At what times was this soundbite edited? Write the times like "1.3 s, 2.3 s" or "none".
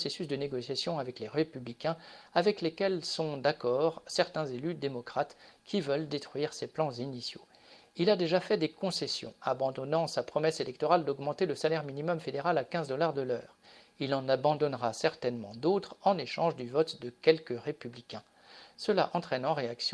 none